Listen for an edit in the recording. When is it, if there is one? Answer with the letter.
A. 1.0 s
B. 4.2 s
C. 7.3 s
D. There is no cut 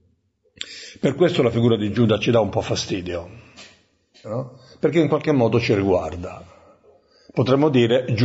B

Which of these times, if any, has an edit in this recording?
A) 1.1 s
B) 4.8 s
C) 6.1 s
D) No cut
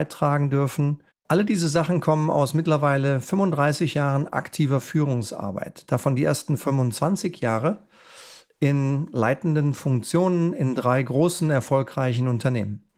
A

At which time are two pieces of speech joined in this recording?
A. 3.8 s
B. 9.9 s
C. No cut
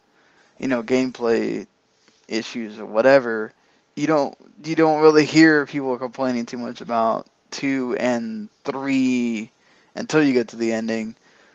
A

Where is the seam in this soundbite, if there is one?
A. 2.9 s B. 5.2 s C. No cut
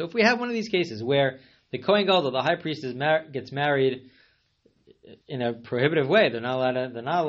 B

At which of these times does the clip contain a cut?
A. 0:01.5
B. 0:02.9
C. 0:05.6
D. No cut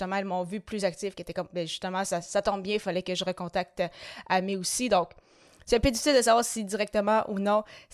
A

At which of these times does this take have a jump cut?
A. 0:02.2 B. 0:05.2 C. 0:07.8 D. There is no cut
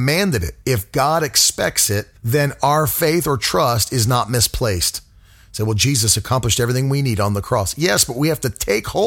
A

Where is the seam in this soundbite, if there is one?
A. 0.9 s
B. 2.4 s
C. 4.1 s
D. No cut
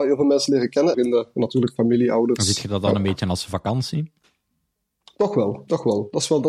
A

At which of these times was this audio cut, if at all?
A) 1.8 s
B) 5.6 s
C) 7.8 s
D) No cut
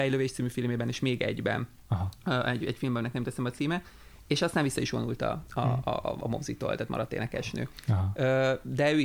D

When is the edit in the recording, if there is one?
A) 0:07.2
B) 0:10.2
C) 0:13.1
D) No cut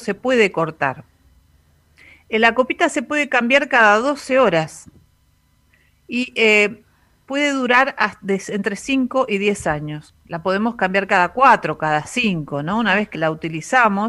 C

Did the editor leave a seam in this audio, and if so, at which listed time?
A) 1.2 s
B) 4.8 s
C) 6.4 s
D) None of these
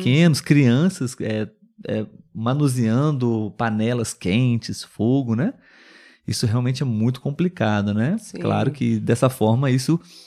D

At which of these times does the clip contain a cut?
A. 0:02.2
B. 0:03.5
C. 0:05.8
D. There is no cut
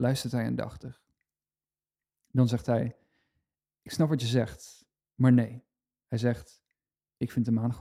D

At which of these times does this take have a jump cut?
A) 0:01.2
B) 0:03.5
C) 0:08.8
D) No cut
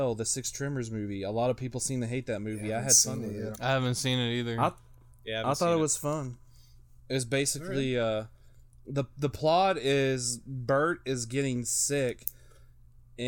B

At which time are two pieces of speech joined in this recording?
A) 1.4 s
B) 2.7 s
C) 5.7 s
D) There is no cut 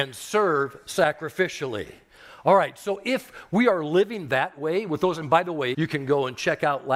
C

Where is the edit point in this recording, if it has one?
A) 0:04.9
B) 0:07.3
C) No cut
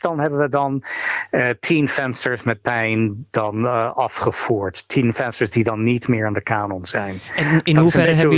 C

